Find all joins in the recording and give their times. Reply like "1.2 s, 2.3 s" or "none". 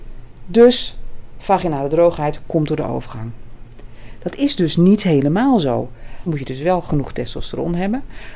6.3 s